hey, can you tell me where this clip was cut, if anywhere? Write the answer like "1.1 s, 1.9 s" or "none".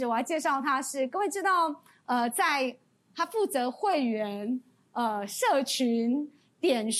none